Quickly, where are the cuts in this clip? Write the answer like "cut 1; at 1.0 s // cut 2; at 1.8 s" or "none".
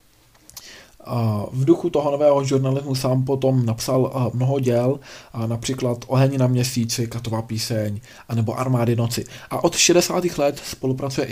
none